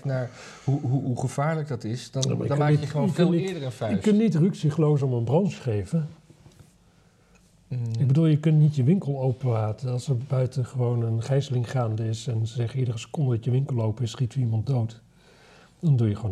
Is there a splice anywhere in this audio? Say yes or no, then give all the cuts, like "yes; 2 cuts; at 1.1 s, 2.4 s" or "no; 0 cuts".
no; 0 cuts